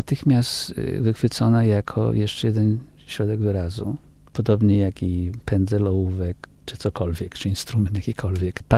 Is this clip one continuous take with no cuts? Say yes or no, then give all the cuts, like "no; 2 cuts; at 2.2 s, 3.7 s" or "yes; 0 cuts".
yes; 0 cuts